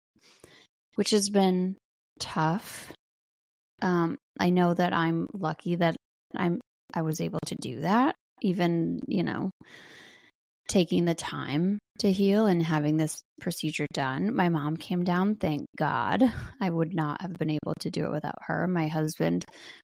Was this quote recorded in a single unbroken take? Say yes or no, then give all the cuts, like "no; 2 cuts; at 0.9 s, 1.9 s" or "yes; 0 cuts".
yes; 0 cuts